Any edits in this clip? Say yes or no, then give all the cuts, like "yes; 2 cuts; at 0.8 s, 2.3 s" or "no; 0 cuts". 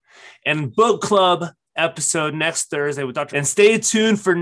yes; 1 cut; at 3.3 s